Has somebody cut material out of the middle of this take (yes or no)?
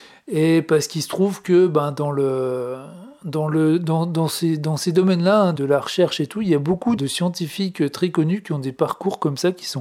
yes